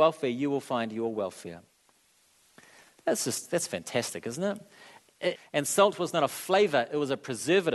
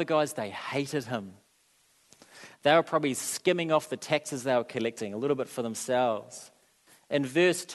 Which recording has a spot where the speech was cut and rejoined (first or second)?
first